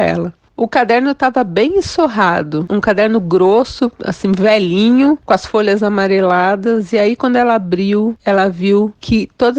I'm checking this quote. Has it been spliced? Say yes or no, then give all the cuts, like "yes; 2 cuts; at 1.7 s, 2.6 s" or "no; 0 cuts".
no; 0 cuts